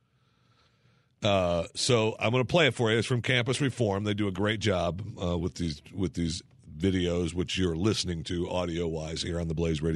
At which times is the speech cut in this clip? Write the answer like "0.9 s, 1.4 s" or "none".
none